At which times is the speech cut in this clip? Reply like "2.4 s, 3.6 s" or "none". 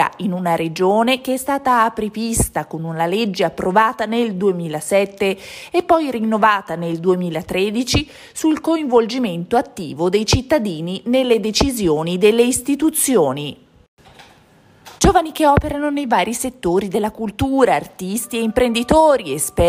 15.0 s